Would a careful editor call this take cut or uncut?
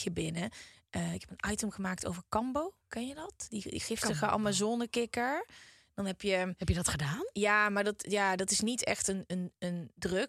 uncut